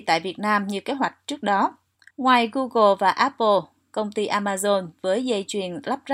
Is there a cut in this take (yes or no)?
yes